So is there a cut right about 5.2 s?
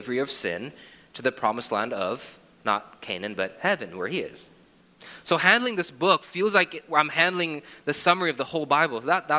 no; 0 cuts

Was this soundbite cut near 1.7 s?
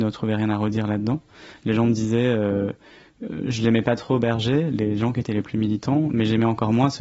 no; 0 cuts

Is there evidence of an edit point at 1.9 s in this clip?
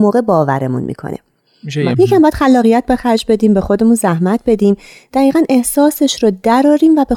yes; 1 cut; at 1.9 s

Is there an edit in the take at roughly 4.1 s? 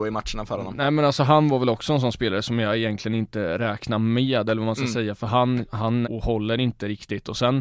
no; 1 cut; at 6.0 s

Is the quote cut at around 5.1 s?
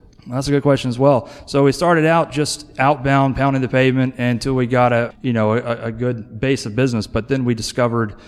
yes; 1 cut; at 5.1 s

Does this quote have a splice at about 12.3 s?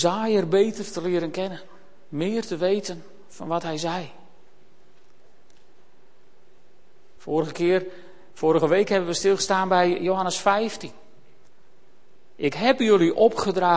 no; 1 cut; at 7.2 s

